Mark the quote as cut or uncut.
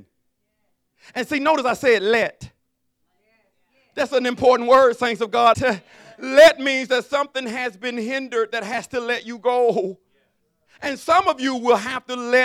cut